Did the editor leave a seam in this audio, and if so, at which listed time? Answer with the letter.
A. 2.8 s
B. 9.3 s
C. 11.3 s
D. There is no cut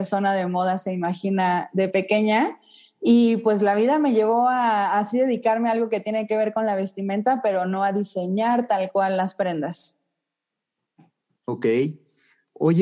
D